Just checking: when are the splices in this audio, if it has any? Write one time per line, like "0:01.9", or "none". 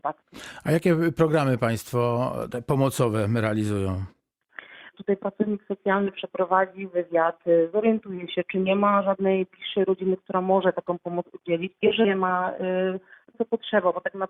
0:04.9
0:11.8
0:13.3